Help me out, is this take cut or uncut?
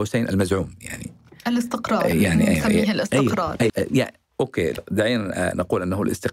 cut